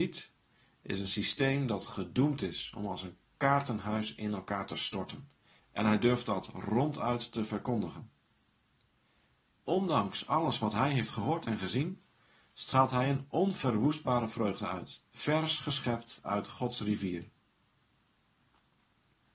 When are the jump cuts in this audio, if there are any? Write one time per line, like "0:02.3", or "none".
0:05.6
0:09.7
0:15.1